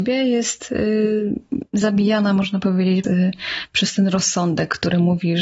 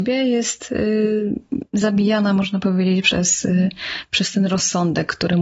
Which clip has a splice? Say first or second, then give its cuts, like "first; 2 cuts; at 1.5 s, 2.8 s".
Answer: first; 1 cut; at 3.0 s